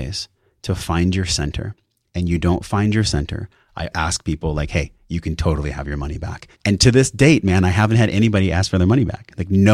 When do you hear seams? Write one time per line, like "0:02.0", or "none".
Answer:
0:03.9
0:06.6